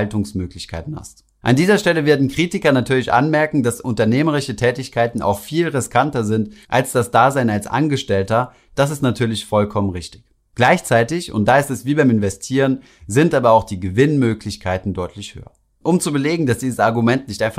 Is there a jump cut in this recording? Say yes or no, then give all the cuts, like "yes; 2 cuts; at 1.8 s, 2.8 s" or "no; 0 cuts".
no; 0 cuts